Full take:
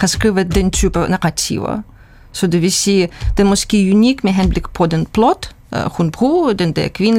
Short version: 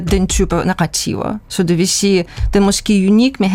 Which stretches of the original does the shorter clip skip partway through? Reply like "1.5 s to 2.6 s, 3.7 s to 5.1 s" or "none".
1.9 s to 2.3 s